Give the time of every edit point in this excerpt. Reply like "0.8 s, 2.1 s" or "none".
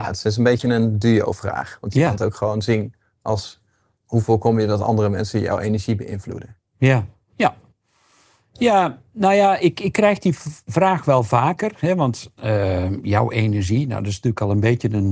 none